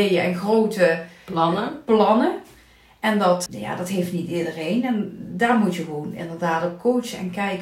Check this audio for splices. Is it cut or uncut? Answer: cut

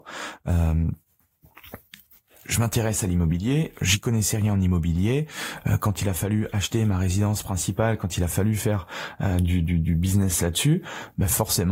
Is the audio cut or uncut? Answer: uncut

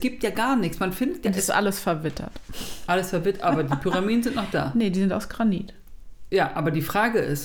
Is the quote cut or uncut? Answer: uncut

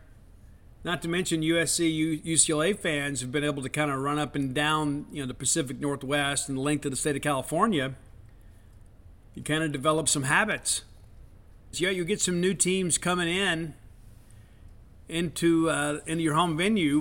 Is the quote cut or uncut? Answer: cut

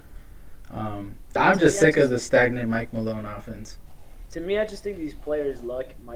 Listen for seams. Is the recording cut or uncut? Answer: cut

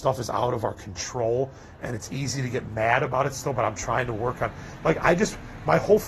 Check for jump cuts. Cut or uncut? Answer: uncut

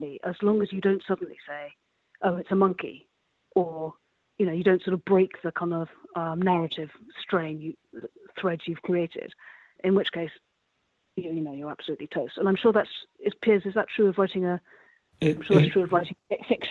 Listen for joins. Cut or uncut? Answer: uncut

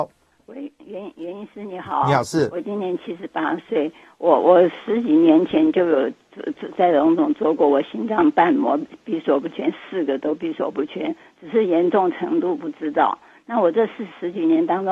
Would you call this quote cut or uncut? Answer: uncut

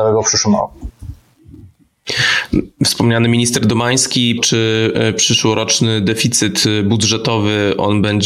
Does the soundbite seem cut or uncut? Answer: cut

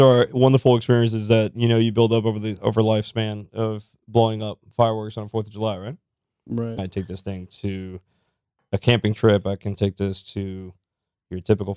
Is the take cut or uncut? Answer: cut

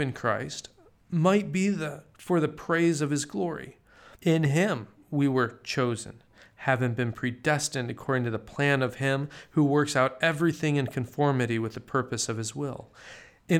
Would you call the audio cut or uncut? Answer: cut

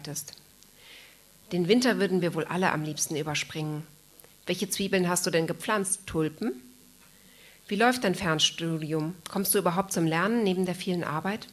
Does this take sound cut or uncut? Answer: uncut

